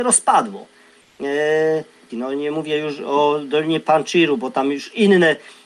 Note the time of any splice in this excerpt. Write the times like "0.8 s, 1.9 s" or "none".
2.1 s